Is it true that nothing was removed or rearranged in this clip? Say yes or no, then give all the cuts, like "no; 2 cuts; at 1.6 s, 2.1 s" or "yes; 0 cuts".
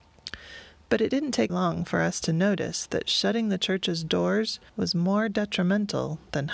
no; 2 cuts; at 1.5 s, 4.7 s